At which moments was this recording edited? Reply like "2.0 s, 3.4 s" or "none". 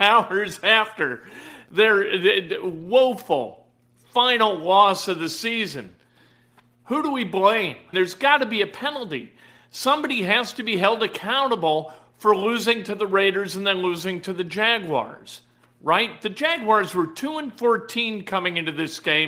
7.9 s